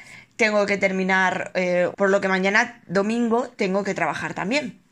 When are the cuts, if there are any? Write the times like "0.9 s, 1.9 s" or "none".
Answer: 1.9 s